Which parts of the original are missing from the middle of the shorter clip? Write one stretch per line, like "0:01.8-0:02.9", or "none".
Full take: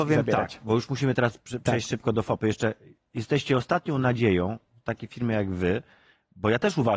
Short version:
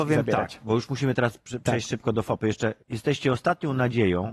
0:02.8-0:03.1